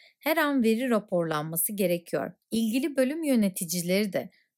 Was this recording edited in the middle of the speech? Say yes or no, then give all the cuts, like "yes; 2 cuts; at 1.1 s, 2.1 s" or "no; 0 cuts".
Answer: yes; 1 cut; at 2.4 s